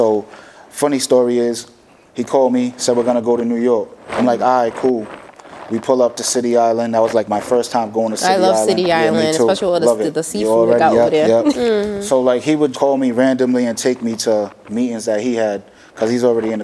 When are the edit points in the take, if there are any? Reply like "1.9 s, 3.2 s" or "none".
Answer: 11.5 s, 12.7 s